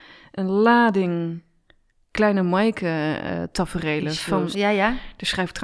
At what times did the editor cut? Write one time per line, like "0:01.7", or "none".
0:04.5